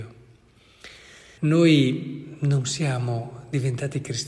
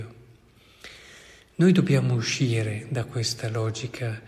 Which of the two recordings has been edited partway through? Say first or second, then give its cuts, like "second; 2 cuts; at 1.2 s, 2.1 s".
first; 1 cut; at 1.4 s